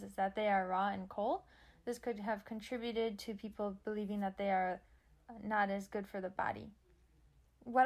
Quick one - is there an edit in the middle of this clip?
no; 0 cuts

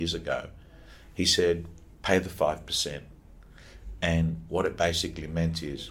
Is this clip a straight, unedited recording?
no; 1 cut; at 1.9 s

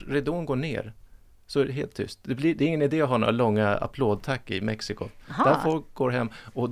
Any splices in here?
no; 0 cuts

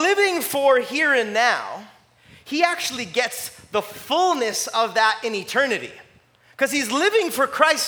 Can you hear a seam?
no; 0 cuts

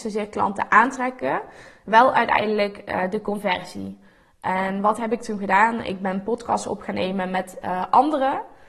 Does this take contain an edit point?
no; 0 cuts

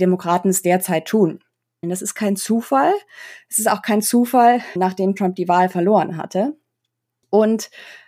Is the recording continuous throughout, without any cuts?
no; 2 cuts; at 1.8 s, 4.8 s

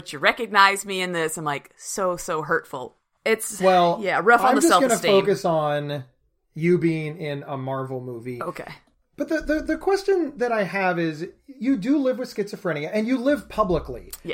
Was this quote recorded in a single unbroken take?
no; 1 cut; at 3.2 s

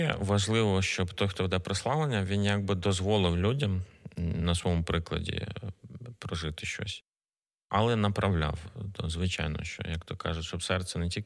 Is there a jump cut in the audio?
no; 0 cuts

